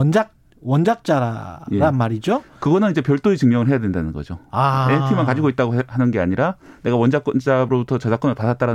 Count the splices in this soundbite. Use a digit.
0